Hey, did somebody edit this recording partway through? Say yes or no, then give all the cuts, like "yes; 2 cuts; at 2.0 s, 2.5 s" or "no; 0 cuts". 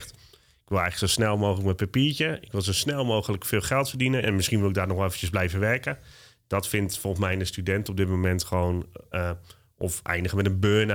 yes; 2 cuts; at 4.2 s, 9.1 s